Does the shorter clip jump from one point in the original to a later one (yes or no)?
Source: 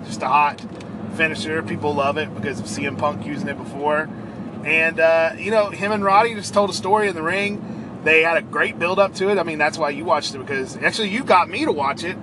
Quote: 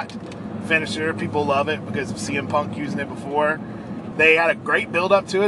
yes